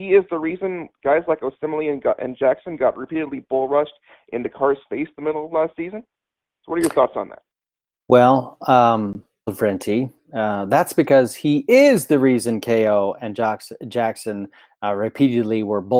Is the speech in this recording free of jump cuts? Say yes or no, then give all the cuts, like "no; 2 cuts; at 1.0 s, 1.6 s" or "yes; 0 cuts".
no; 1 cut; at 9.5 s